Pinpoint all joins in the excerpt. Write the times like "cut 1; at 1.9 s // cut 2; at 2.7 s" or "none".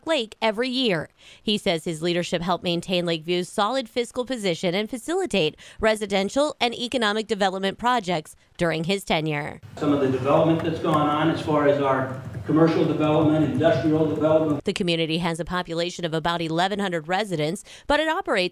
cut 1; at 14.6 s